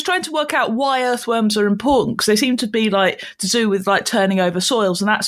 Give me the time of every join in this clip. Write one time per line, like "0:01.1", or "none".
none